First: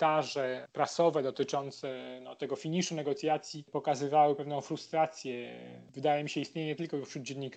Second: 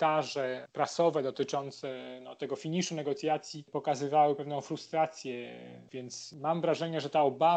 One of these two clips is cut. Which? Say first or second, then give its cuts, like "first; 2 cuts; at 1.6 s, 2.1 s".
second; 1 cut; at 5.9 s